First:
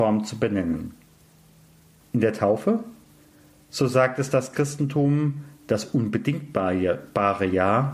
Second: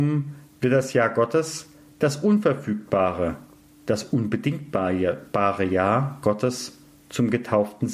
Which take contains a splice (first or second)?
first